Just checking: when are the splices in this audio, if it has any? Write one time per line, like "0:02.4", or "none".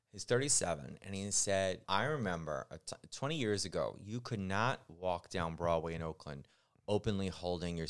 0:01.8